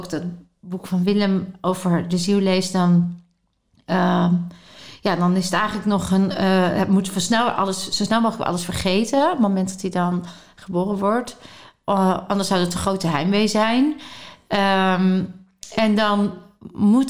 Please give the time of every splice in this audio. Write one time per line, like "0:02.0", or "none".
none